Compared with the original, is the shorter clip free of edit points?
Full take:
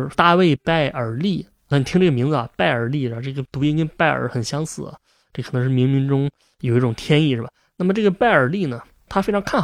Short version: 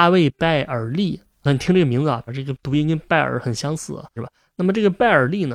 no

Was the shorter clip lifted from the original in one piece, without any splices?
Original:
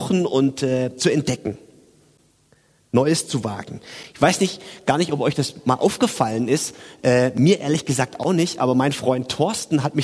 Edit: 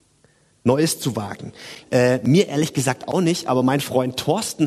no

